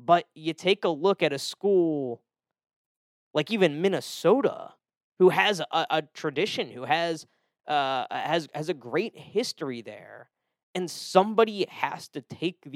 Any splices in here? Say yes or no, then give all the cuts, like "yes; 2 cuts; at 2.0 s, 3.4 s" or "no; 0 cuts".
no; 0 cuts